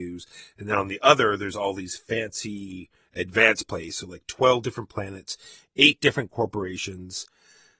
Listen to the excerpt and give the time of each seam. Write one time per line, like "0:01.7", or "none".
none